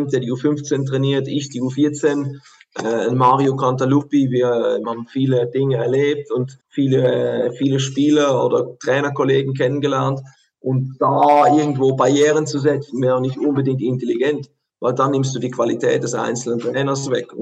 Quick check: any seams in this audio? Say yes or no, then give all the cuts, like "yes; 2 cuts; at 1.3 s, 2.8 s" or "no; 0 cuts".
yes; 2 cuts; at 4.8 s, 6.6 s